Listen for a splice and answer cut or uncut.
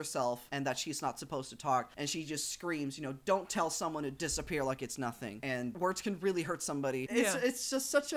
uncut